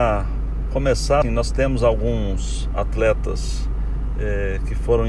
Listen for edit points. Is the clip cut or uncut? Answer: cut